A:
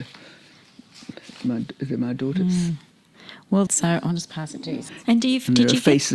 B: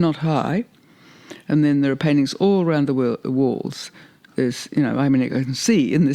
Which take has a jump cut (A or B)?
A